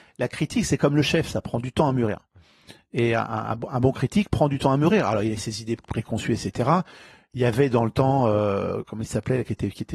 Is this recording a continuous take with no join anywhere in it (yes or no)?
yes